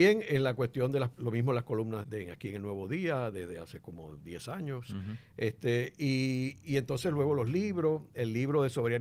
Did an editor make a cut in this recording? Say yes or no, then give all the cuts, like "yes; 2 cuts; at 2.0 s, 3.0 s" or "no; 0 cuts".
yes; 1 cut; at 2.0 s